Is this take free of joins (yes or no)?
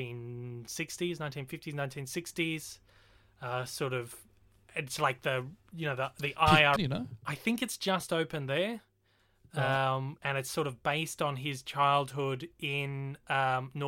no